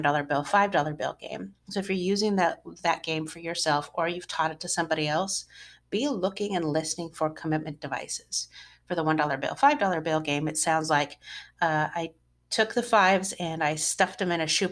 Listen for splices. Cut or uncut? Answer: uncut